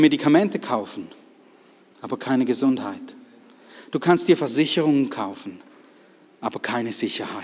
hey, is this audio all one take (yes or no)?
yes